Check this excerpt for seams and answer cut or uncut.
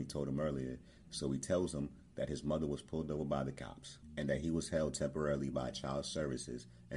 uncut